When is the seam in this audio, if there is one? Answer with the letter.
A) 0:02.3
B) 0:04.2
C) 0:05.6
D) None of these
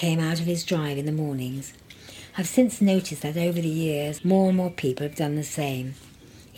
B